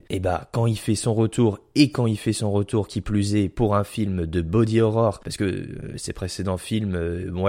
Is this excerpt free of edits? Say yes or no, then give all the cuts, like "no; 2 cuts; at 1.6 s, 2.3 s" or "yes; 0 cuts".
yes; 0 cuts